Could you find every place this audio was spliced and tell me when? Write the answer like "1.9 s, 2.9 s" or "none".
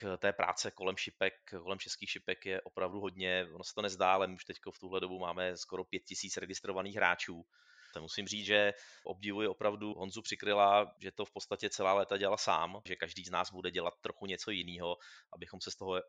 7.9 s, 12.9 s